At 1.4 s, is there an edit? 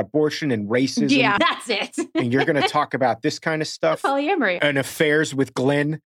yes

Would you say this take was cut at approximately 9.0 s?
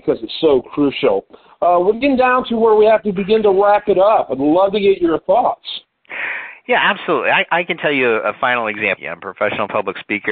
yes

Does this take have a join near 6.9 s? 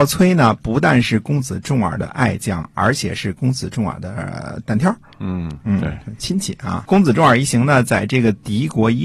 yes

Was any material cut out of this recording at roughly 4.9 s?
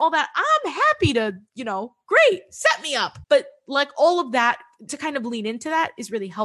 yes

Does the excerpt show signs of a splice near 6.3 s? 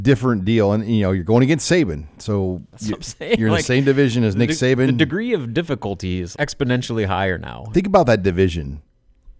yes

